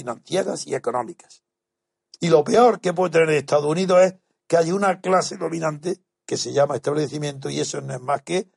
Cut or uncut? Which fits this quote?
cut